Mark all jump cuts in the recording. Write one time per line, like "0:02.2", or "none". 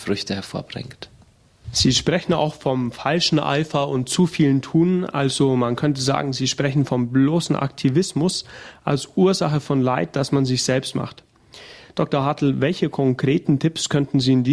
none